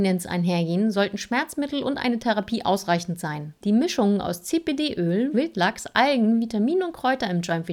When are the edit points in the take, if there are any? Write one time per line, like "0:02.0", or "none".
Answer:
0:03.6
0:05.3